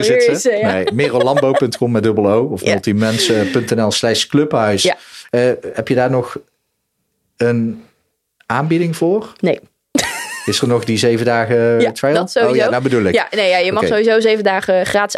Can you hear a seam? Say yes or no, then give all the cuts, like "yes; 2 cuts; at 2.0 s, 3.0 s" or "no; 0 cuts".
no; 0 cuts